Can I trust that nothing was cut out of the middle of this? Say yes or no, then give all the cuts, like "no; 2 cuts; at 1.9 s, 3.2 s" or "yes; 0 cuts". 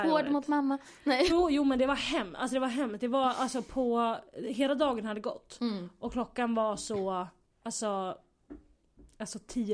no; 1 cut; at 1.3 s